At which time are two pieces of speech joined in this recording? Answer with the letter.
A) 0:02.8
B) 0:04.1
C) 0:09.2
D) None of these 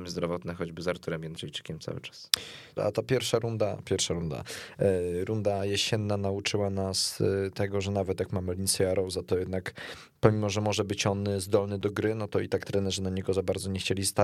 A